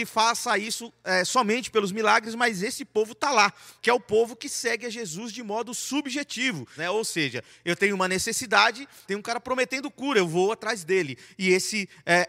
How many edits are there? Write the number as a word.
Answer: three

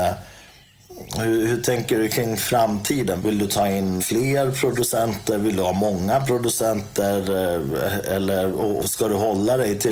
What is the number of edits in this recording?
one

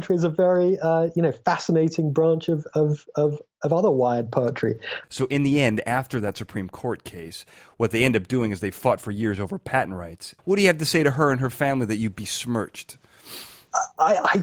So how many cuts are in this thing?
two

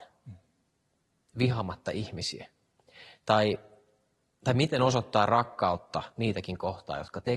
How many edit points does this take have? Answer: zero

